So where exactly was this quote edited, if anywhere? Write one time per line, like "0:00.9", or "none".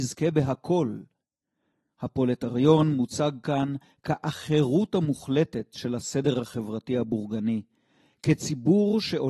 none

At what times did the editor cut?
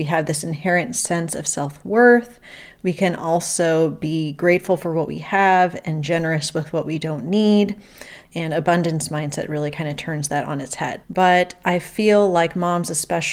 0:08.2
0:11.0

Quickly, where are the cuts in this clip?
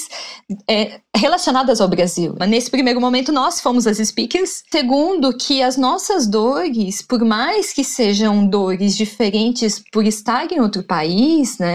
0:02.4
0:04.7

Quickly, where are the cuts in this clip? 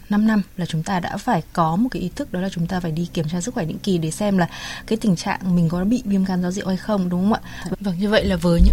0:07.7

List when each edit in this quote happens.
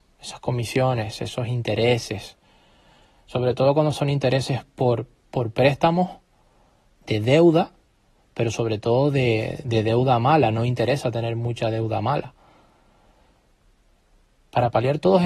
0:06.9

